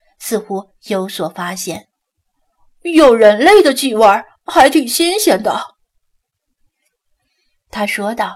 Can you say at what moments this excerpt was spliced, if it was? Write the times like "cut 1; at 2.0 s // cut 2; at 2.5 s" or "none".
none